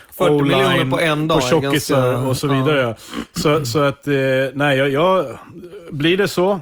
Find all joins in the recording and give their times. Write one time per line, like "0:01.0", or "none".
none